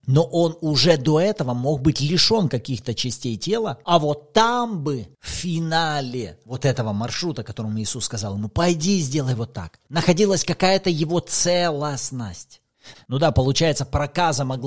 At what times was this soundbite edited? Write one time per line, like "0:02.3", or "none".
0:12.9